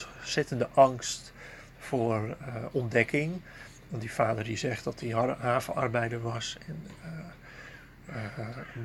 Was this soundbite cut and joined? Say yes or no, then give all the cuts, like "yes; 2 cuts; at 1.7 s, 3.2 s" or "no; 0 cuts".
no; 0 cuts